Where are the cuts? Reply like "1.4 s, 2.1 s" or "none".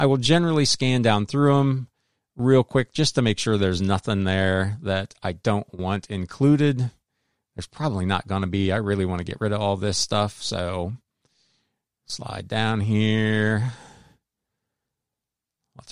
none